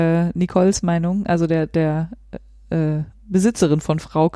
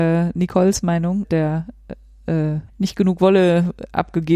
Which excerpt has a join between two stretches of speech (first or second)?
second